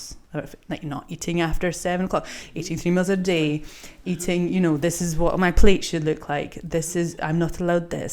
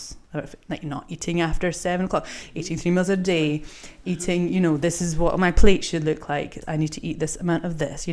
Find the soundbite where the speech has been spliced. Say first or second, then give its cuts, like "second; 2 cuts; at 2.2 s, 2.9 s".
second; 1 cut; at 6.6 s